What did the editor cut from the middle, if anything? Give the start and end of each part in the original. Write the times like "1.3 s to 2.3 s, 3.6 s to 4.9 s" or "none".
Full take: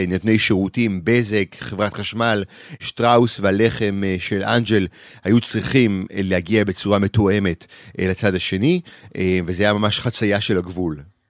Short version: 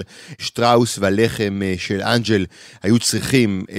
none